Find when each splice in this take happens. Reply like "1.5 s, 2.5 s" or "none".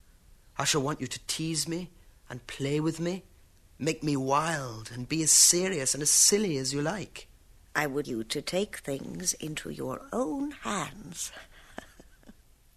8.0 s